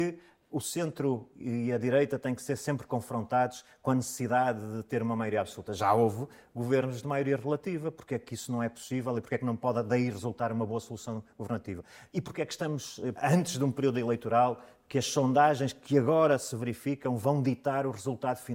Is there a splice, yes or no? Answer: yes